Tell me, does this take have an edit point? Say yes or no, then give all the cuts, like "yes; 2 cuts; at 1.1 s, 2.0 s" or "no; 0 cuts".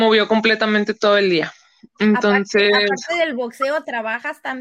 no; 0 cuts